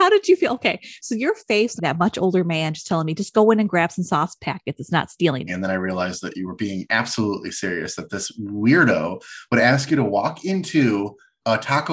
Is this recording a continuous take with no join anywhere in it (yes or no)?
no